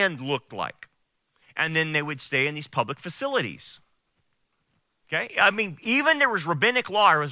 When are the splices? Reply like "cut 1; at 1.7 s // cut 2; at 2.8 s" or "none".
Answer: cut 1; at 1.4 s

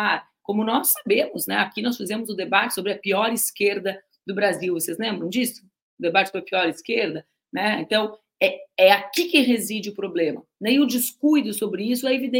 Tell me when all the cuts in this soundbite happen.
none

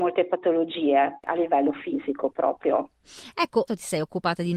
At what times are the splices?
cut 1; at 3.7 s

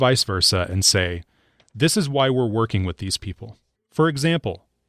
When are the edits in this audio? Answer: cut 1; at 3.7 s

